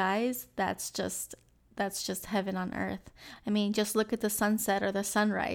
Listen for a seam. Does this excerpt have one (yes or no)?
yes